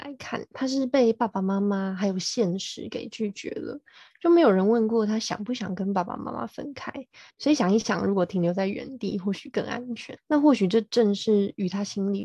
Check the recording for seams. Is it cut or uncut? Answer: cut